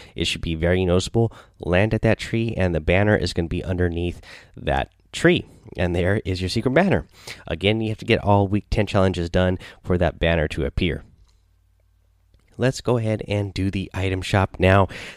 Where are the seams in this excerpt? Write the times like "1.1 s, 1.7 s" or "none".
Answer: none